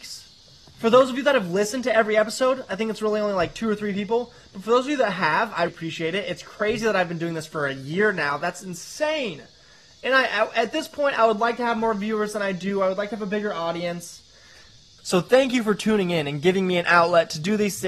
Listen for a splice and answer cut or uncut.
cut